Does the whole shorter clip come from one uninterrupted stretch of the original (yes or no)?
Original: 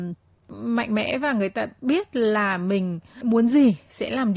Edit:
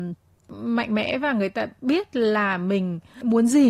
yes